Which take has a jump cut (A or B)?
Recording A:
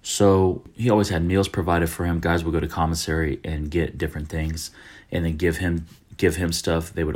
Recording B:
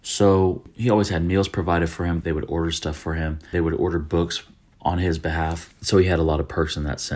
B